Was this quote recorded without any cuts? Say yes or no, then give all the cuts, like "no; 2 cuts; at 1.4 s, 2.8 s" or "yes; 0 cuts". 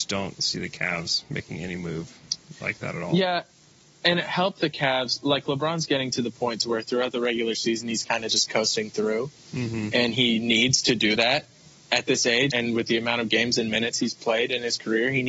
no; 1 cut; at 12.5 s